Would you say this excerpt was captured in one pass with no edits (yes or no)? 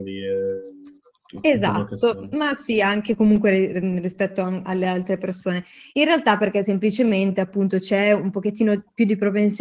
yes